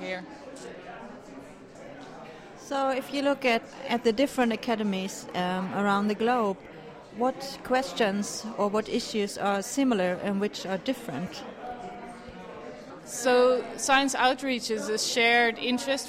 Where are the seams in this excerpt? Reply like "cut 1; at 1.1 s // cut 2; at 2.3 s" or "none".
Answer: cut 1; at 13.0 s